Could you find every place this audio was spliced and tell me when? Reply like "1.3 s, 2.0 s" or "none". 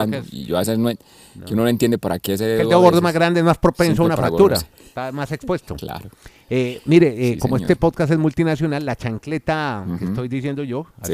none